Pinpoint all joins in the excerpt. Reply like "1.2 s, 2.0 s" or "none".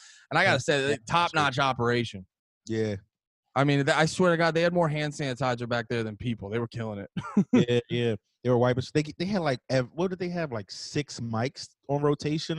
none

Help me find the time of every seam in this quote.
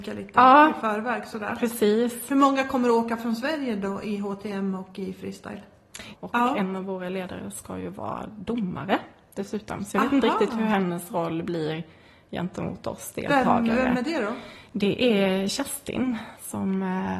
6.1 s

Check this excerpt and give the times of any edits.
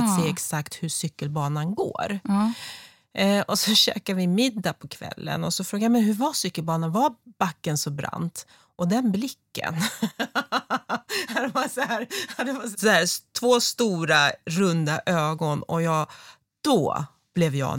12.7 s

